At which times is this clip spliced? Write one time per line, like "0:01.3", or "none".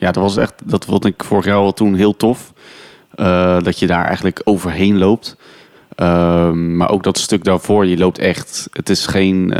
none